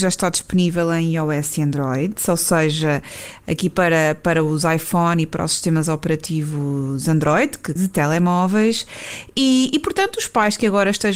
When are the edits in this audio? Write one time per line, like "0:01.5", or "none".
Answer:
0:07.8